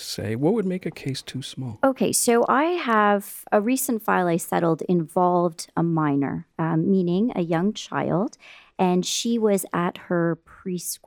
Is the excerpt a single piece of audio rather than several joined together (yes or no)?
yes